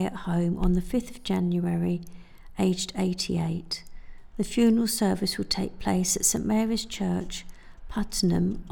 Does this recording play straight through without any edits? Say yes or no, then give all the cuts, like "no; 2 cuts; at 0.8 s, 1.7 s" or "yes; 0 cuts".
yes; 0 cuts